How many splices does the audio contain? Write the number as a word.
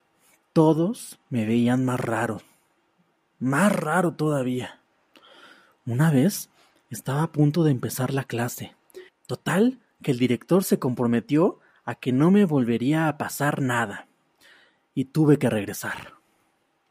one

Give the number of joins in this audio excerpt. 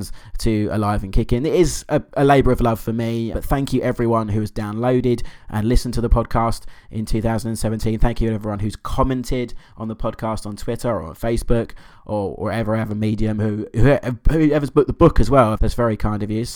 two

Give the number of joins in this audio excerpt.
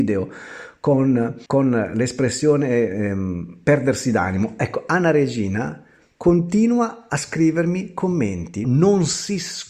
two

